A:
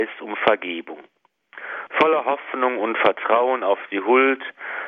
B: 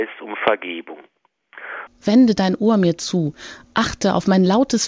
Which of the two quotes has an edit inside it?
B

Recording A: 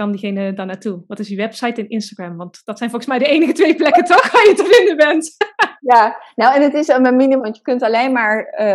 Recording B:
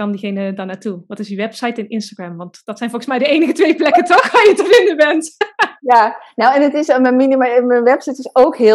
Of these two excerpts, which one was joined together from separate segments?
A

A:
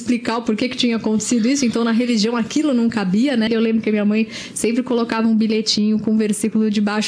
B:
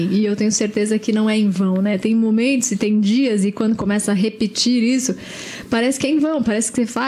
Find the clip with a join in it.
A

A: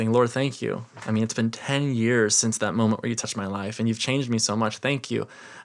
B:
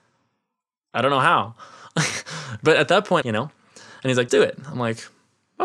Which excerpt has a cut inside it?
B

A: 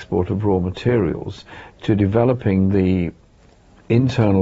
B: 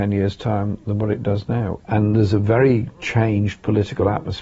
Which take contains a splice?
B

